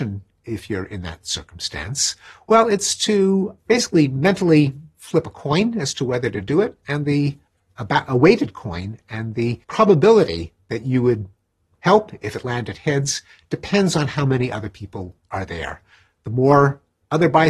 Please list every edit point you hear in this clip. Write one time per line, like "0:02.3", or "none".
0:09.6